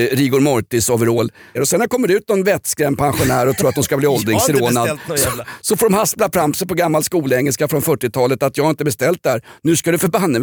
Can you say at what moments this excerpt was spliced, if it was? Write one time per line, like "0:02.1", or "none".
0:01.5